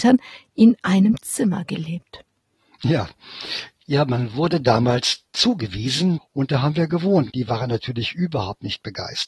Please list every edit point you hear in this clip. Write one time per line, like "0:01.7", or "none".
0:06.2
0:07.3